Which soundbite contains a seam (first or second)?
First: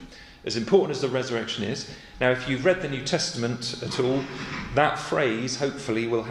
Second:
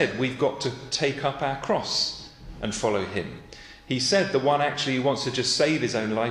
first